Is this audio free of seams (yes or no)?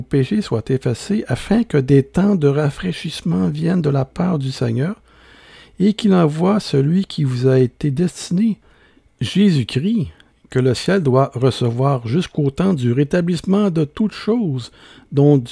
yes